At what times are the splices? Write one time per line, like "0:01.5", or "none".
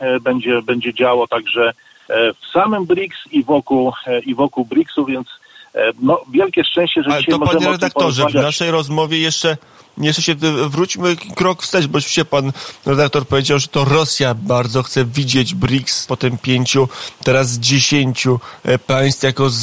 0:16.1